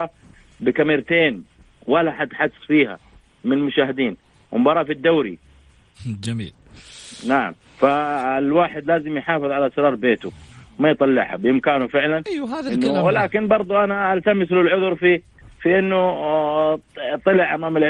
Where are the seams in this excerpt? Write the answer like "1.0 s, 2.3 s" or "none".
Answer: none